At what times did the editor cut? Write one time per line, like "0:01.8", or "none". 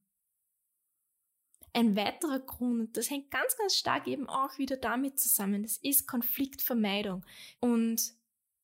0:07.6